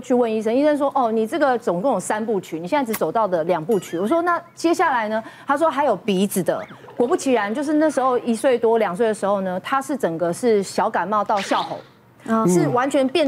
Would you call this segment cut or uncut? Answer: uncut